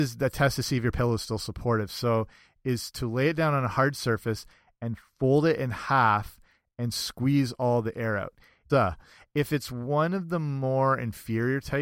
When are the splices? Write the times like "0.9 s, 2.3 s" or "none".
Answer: 8.7 s